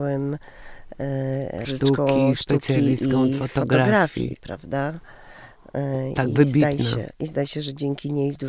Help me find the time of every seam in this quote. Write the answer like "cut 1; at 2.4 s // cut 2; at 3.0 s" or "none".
cut 1; at 1.6 s